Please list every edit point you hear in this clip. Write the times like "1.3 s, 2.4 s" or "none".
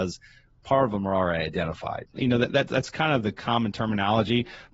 2.1 s